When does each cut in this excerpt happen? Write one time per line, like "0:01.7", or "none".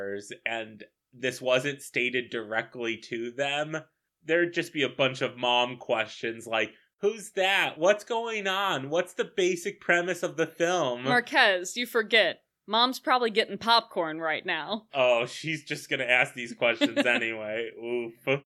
none